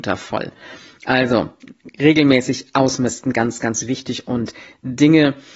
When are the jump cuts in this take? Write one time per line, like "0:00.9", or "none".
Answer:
none